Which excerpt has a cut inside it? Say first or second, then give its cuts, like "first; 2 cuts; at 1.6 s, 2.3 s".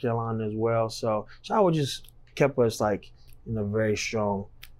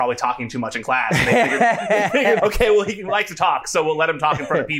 second; 1 cut; at 2.4 s